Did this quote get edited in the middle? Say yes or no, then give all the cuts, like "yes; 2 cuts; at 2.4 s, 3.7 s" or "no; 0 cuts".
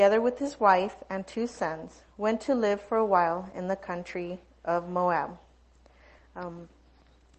yes; 1 cut; at 6.2 s